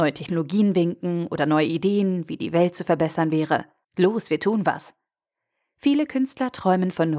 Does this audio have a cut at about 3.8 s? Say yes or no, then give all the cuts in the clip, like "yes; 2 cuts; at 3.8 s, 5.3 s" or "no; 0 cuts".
yes; 1 cut; at 3.8 s